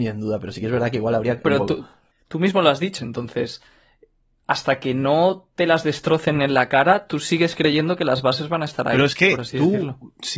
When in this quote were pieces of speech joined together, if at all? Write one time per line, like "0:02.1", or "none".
0:01.4
0:03.0